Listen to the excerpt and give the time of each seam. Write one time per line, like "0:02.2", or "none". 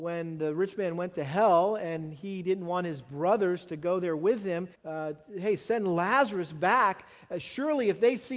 0:04.7